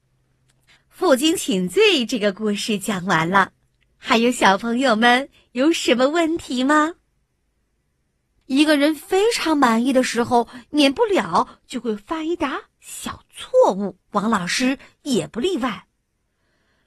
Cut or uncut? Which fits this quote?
cut